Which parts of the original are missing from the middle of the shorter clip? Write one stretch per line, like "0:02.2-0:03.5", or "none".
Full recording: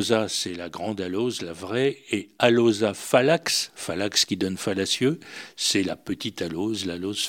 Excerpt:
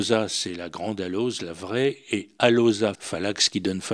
0:02.9-0:03.7

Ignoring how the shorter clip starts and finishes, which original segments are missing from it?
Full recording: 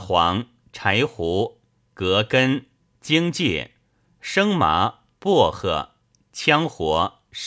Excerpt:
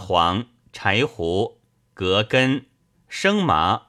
0:02.9-0:04.1

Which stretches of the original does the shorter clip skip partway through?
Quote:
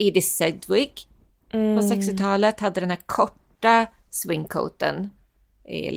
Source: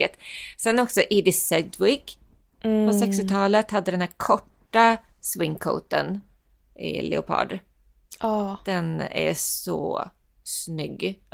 none

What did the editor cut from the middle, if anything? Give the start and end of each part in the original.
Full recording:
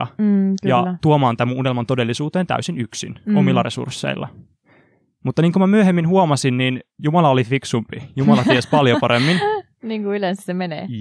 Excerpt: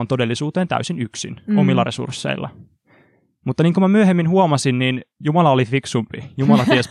none

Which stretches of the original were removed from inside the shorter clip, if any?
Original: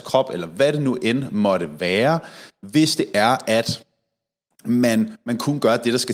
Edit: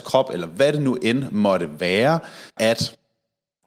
0:02.6-0:03.4

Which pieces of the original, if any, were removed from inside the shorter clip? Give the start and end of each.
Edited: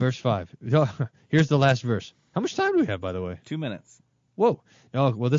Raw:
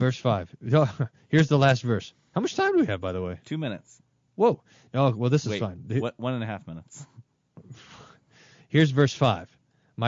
none

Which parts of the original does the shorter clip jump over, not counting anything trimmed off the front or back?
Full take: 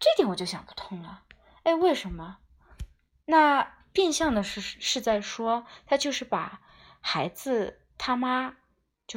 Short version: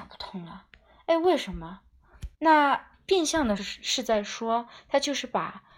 0:02.9-0:03.2
0:04.4-0:04.6

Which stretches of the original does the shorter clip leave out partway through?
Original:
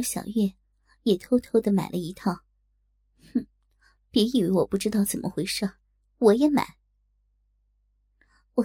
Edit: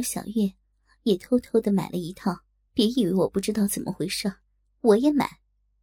0:02.7-0:04.1

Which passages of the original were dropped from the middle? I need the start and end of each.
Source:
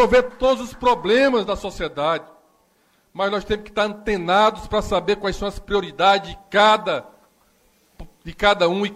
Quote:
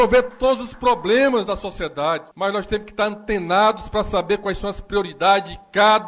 0:02.3-0:03.1

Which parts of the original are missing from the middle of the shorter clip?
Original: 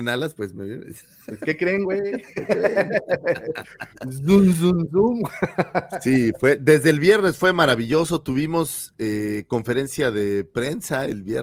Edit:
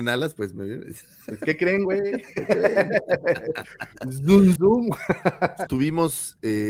0:04.6-0:04.9
0:06.0-0:08.2

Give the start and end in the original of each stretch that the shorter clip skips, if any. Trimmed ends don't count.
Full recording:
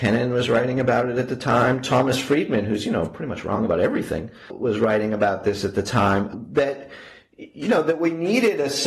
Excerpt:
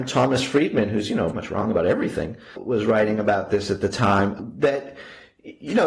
0:03.1-0:03.3

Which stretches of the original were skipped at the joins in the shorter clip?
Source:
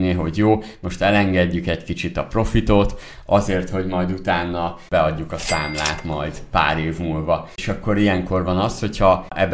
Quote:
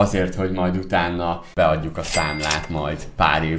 none

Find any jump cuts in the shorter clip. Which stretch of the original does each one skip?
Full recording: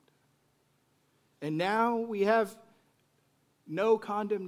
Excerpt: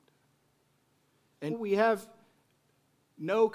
0:01.5-0:02.0

